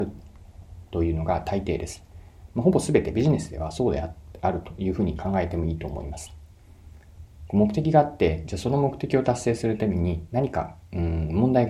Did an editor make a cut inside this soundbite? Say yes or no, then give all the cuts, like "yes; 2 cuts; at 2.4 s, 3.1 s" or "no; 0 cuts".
no; 0 cuts